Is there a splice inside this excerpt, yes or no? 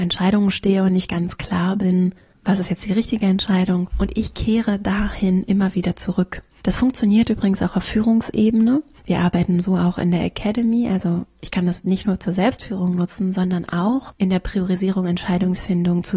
no